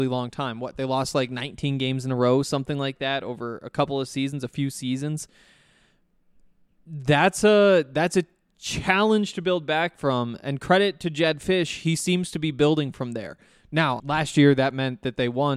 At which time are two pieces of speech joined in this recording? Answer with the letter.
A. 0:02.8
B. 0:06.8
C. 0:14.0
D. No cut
C